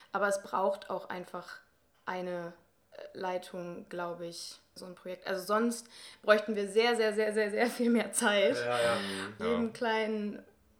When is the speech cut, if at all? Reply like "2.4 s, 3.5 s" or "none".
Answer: 4.8 s, 9.4 s